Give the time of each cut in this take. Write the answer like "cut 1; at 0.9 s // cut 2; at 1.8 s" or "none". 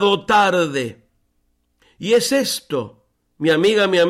none